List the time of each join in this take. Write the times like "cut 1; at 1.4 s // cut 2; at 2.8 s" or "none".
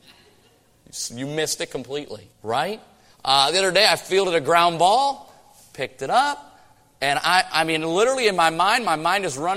cut 1; at 2.3 s